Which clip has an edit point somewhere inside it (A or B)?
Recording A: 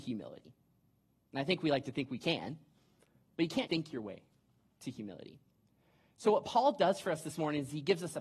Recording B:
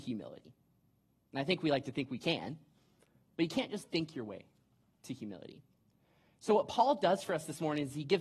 A